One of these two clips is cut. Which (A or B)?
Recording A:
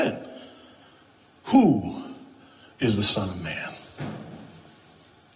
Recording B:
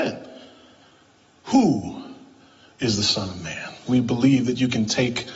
B